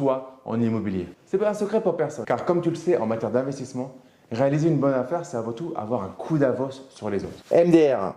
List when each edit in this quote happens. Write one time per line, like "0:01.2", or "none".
0:01.1
0:02.2